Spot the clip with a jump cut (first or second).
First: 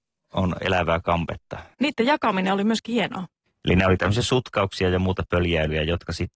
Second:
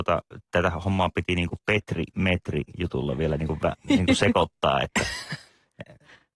first